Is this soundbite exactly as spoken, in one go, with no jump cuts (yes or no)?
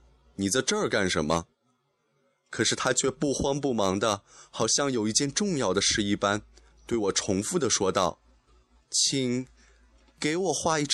yes